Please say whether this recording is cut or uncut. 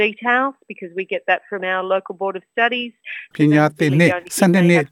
cut